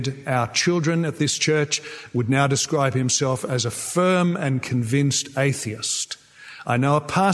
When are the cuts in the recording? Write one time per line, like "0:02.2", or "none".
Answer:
none